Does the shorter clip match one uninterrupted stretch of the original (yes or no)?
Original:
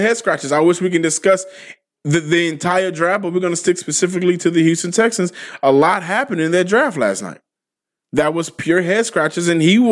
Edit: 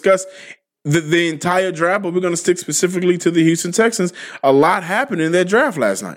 yes